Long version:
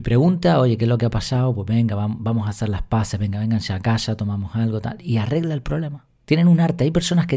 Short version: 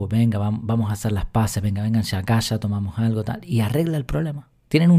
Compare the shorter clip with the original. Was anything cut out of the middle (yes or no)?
no